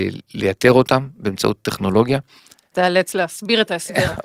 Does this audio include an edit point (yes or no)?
yes